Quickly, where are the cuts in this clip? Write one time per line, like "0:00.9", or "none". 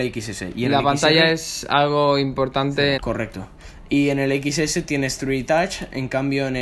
0:03.0